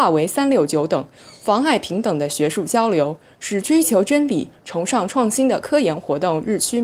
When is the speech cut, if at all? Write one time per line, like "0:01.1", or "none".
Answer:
none

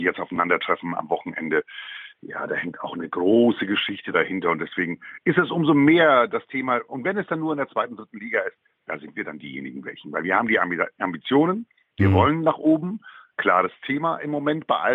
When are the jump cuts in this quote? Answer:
none

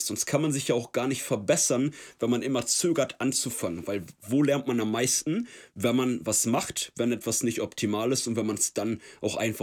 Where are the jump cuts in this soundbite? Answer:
none

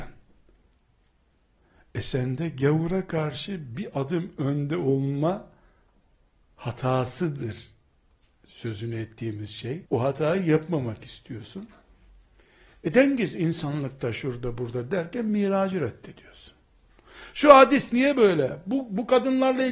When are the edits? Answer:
0:09.9

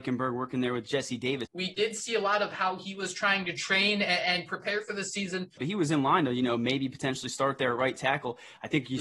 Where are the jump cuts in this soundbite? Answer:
0:01.5
0:05.6

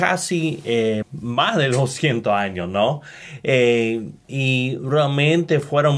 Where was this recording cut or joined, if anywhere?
0:01.0

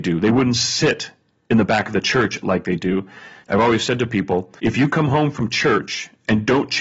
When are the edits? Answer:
0:03.4
0:04.6

